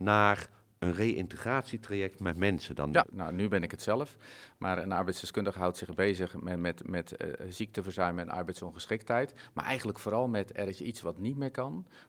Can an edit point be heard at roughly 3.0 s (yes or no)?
yes